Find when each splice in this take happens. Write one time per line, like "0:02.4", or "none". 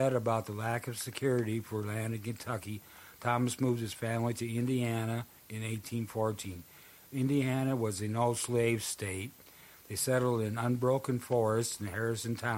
none